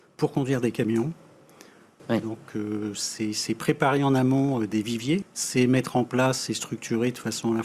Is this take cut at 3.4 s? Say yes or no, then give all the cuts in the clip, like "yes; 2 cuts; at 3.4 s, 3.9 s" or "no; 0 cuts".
no; 2 cuts; at 2.0 s, 5.2 s